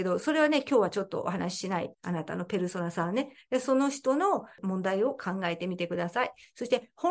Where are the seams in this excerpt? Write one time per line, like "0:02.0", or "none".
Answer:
0:01.9